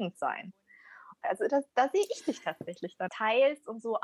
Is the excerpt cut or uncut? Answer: cut